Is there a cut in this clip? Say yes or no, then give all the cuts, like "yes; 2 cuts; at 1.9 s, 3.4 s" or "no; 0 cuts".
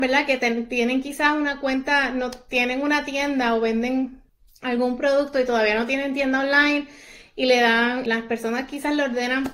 no; 0 cuts